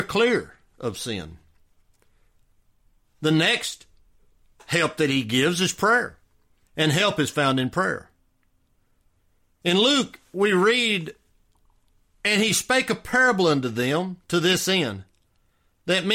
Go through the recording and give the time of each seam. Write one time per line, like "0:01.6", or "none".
0:06.6